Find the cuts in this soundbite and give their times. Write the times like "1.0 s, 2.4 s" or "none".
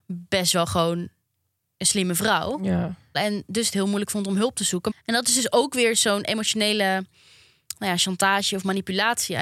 3.1 s, 4.9 s